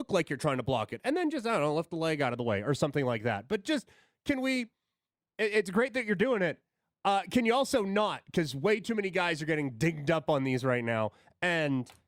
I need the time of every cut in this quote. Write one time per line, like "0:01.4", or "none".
none